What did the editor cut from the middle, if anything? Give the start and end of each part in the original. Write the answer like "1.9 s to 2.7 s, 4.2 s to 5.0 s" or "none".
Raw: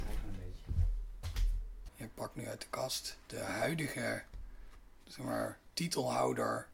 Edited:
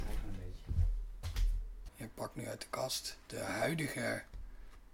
none